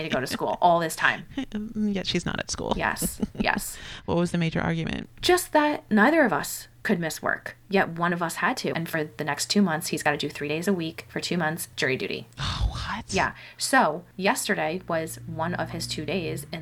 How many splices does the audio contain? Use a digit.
1